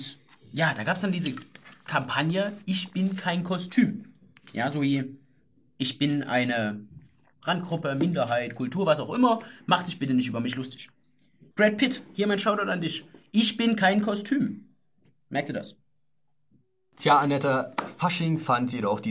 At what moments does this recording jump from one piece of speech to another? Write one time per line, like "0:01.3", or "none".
0:11.5